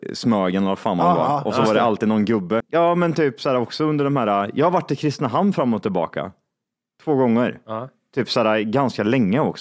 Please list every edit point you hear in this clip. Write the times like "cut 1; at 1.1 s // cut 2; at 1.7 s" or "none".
cut 1; at 2.6 s